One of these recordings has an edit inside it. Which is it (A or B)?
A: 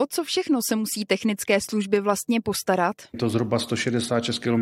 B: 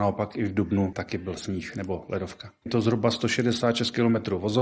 B